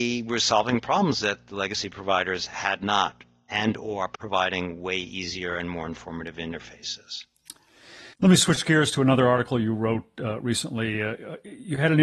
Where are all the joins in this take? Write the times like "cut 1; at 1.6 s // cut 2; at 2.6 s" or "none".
cut 1; at 8.1 s